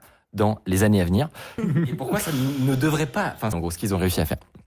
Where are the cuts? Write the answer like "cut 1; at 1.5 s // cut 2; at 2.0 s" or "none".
cut 1; at 1.6 s // cut 2; at 3.5 s